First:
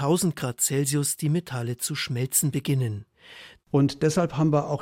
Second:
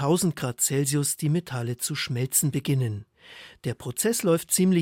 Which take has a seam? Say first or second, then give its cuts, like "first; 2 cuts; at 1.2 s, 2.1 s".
first; 1 cut; at 3.6 s